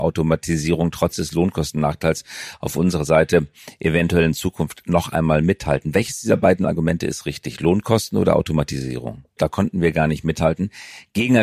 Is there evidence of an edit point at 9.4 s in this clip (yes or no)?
yes